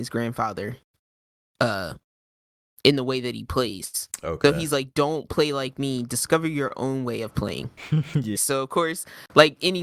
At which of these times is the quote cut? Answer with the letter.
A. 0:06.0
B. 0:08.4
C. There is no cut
B